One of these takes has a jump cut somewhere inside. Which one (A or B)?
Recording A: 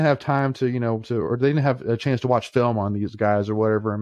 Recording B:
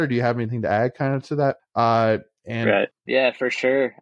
B